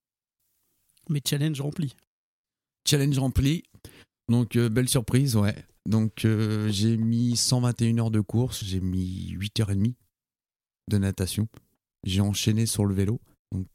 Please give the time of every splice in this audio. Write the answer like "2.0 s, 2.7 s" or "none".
8.6 s